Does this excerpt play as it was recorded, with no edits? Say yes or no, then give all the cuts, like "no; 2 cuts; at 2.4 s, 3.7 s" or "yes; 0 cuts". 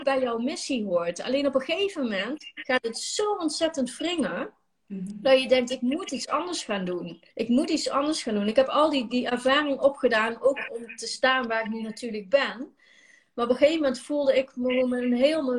no; 1 cut; at 7.3 s